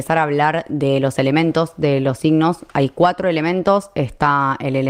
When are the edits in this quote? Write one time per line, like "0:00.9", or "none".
none

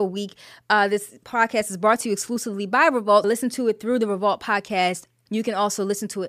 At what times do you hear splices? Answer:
0:03.2
0:05.3

